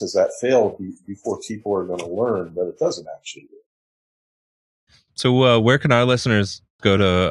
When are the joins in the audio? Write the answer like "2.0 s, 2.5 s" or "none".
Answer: none